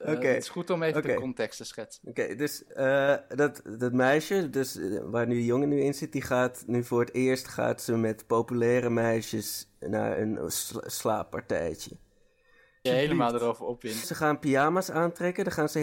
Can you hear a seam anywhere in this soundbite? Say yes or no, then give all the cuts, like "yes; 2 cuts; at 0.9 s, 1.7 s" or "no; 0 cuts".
yes; 2 cuts; at 12.9 s, 14.0 s